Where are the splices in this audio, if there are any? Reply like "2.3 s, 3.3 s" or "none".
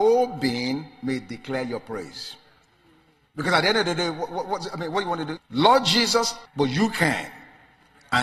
5.4 s, 6.5 s